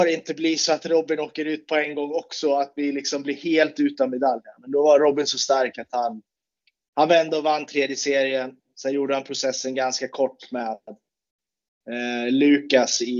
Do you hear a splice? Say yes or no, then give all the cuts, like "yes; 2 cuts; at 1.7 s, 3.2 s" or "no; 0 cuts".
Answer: no; 0 cuts